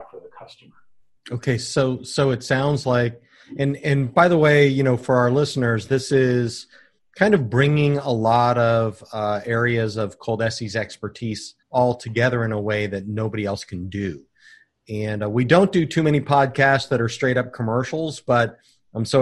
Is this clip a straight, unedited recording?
no; 1 cut; at 11.6 s

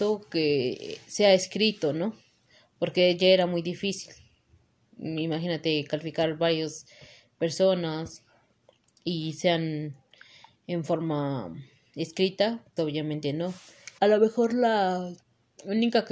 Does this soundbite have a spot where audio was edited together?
yes; 2 cuts; at 12.8 s, 14.0 s

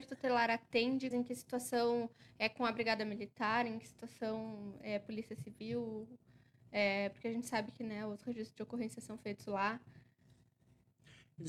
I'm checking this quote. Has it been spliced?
yes; 1 cut; at 1.1 s

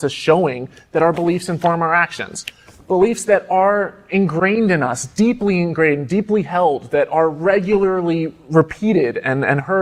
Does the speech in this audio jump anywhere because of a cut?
no; 0 cuts

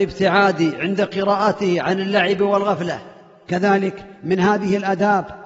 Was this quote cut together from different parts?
no; 0 cuts

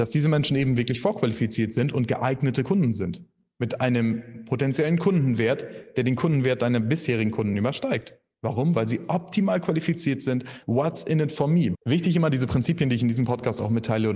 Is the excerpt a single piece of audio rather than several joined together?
no; 2 cuts; at 10.6 s, 11.7 s

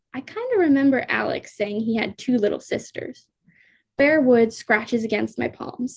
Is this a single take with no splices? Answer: yes; 0 cuts

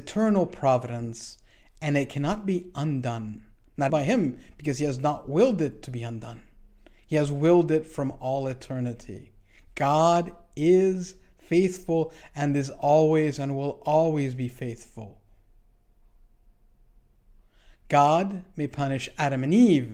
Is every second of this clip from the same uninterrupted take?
no; 1 cut; at 3.9 s

